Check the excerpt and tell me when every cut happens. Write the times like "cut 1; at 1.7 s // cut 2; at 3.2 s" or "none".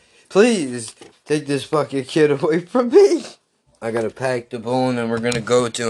cut 1; at 1.1 s // cut 2; at 3.7 s